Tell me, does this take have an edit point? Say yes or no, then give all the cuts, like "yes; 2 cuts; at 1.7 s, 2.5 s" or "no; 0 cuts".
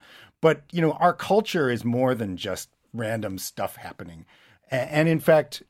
no; 0 cuts